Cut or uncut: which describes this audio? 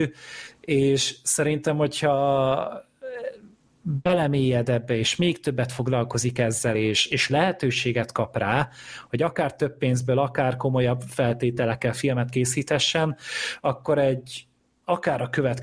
uncut